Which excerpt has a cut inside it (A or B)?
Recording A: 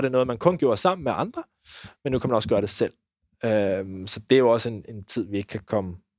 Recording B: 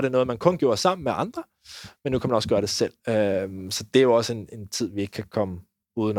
B